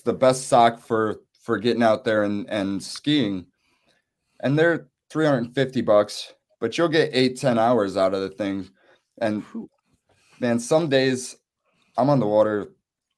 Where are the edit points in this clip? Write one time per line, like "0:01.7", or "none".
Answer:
none

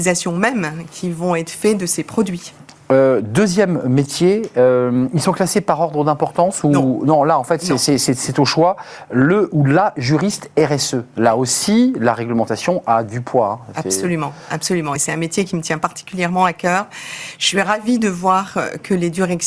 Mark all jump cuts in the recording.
none

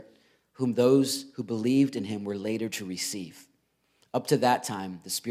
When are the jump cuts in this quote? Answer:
none

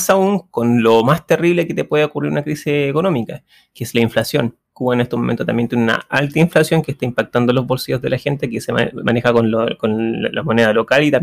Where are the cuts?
none

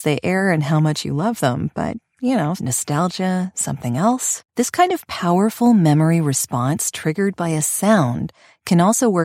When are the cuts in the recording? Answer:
0:02.6
0:04.5

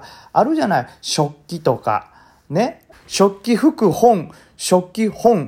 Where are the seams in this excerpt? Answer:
0:02.9

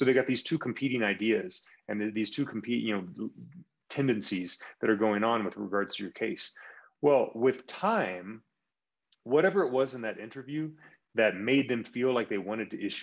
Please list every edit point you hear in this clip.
none

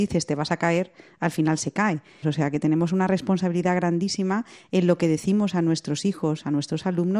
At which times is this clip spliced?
0:02.2

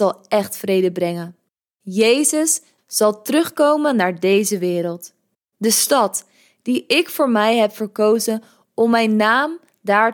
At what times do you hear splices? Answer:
0:02.8
0:05.5

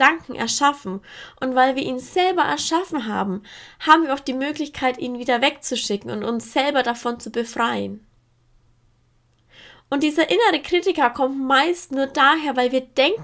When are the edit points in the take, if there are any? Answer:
none

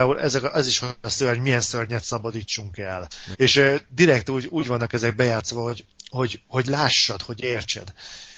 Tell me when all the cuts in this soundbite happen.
0:03.3

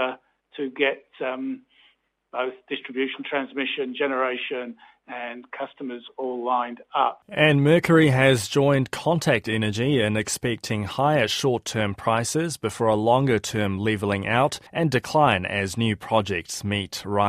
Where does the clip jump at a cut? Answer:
0:07.2
0:14.7

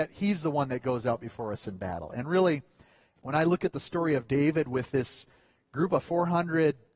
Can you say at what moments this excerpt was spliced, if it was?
none

